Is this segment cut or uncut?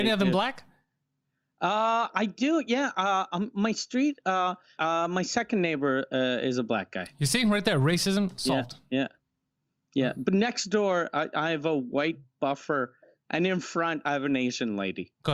cut